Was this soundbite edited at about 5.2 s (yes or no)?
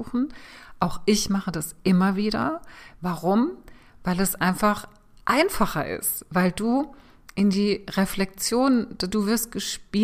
no